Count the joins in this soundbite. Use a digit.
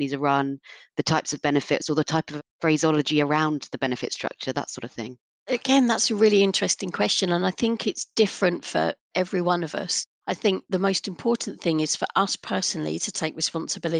0